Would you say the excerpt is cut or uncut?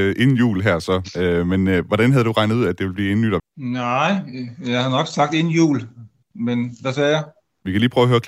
cut